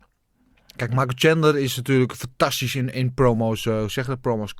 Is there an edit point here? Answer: no; 0 cuts

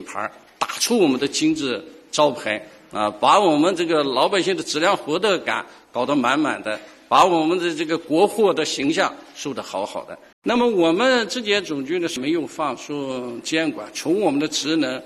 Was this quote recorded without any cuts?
no; 1 cut; at 10.3 s

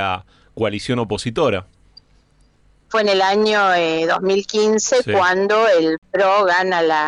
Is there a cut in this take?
yes; 1 cut; at 2.9 s

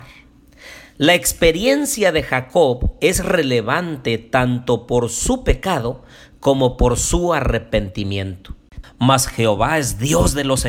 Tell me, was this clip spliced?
yes; 1 cut; at 8.8 s

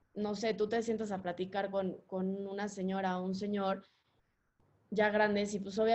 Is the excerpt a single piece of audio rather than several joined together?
yes; 0 cuts

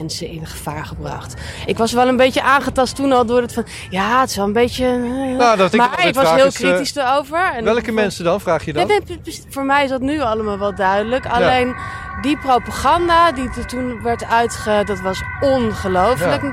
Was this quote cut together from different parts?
no; 0 cuts

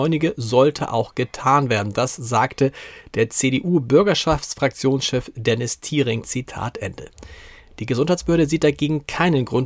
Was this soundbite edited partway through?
yes; 1 cut; at 6.2 s

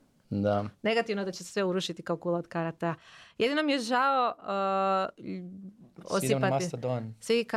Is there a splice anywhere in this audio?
yes; 1 cut; at 6.0 s

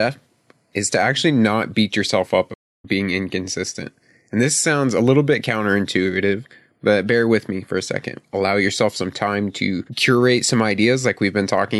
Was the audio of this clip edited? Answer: yes; 2 cuts; at 8.2 s, 9.9 s

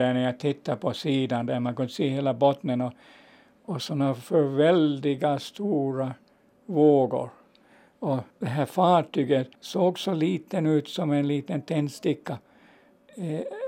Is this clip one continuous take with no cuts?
no; 2 cuts; at 8.3 s, 9.6 s

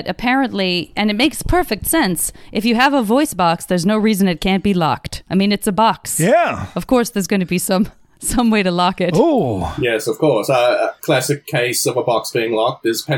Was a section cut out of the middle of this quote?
no; 0 cuts

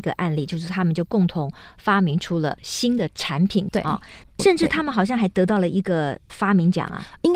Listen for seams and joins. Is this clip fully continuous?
no; 1 cut; at 3.7 s

